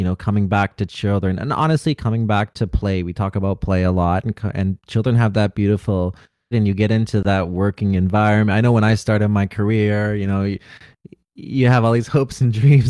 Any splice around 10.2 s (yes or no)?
no